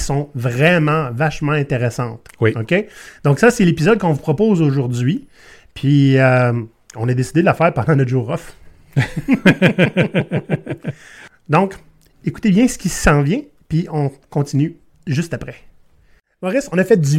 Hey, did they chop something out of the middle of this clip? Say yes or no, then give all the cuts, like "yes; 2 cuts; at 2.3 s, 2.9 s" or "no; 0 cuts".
no; 0 cuts